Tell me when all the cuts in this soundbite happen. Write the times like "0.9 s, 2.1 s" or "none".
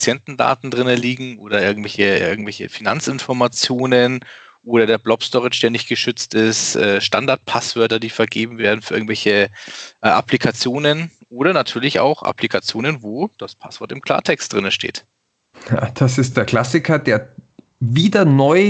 none